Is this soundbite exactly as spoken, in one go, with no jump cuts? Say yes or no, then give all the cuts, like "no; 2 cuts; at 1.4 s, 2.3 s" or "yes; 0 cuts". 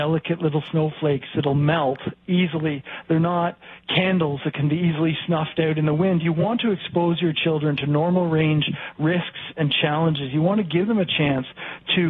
yes; 0 cuts